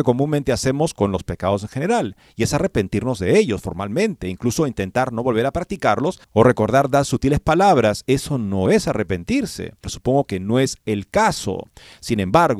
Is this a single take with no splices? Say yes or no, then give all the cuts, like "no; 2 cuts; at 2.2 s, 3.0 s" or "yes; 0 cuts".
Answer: no; 2 cuts; at 6.2 s, 9.8 s